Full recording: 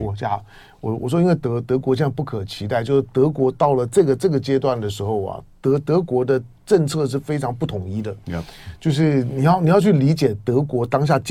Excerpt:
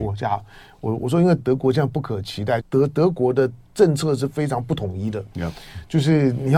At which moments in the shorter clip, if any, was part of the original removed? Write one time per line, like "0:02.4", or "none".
0:01.4
0:02.6